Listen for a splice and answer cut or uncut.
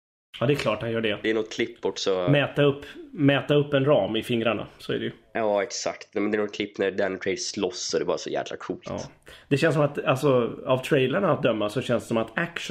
uncut